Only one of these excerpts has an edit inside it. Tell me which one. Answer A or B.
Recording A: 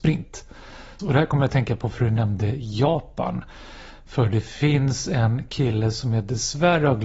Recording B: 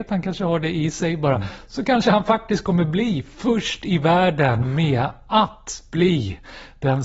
A